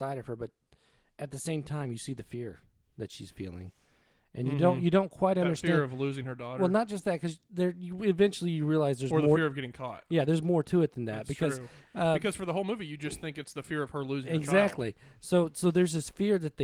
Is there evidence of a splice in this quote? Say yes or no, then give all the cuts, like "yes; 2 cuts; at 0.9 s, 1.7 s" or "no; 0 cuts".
no; 0 cuts